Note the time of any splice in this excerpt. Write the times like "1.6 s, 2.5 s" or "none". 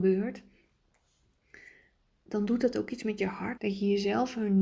3.6 s